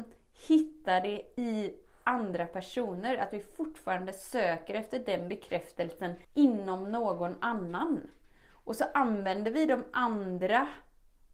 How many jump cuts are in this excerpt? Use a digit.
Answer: 1